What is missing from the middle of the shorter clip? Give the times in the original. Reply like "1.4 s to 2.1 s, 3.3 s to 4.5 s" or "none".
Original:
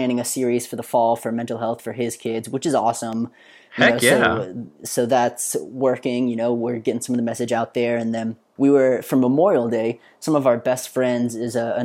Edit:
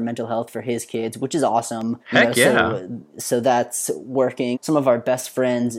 3.3 s to 3.7 s, 6.2 s to 10.1 s